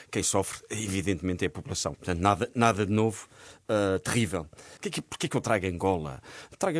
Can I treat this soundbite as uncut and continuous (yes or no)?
no